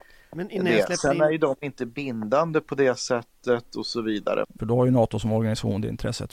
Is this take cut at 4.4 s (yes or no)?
yes